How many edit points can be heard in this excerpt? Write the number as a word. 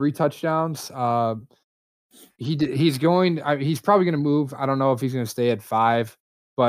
zero